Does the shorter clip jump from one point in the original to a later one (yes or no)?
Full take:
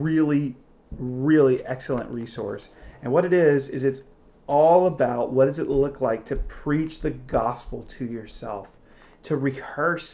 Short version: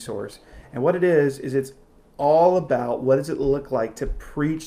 no